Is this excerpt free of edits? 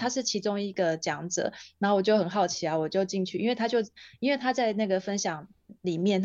yes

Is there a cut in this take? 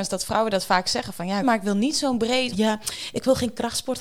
yes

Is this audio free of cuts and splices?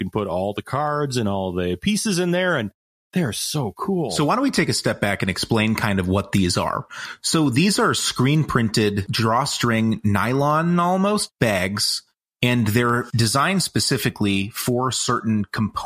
yes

